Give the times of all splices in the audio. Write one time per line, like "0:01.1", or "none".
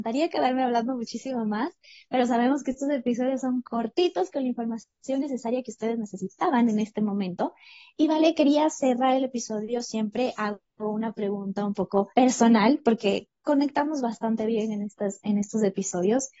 0:12.1

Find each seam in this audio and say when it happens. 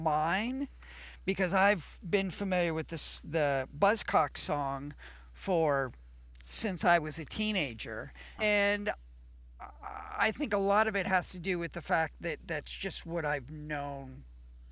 0:06.4
0:08.4

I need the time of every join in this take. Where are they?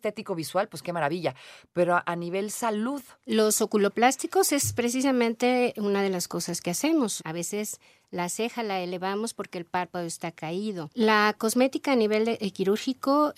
0:07.2
0:10.9

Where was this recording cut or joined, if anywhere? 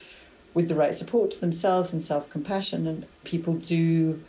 0:03.2

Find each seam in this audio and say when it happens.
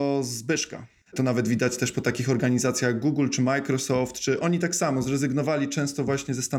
0:01.0

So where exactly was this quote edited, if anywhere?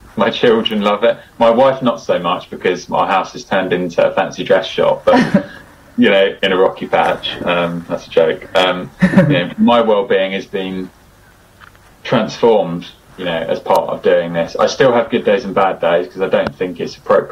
0:06.4

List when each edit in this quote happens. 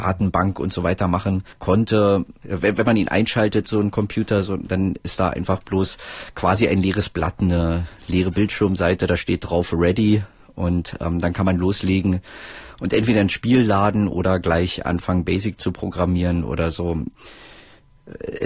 0:01.5

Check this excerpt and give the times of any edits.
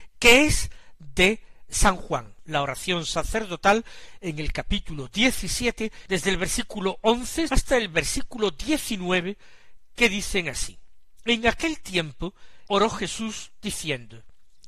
0:07.5
0:12.7

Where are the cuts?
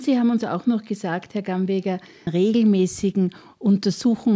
0:02.3

